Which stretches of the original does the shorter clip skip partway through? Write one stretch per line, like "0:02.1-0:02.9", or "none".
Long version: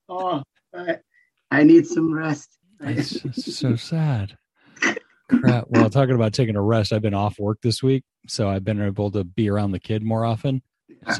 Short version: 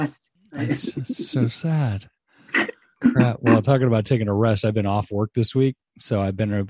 none

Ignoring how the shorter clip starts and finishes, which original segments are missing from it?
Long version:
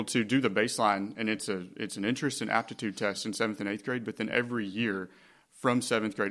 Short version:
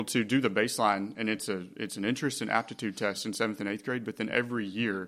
none

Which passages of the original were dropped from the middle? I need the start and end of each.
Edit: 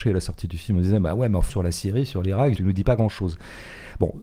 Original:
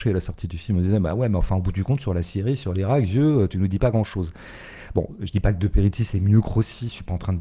0:01.5-0:02.0
0:03.1-0:03.5

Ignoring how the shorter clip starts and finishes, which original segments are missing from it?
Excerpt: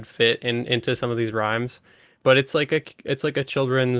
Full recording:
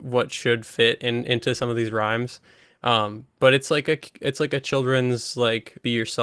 0:02.7-0:03.3

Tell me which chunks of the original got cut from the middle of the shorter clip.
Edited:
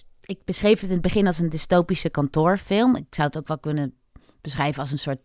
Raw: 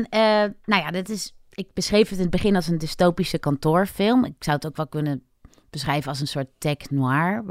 none

